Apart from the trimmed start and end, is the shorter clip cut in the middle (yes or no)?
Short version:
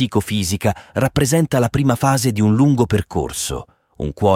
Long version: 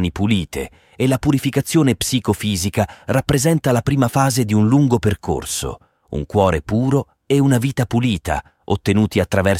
no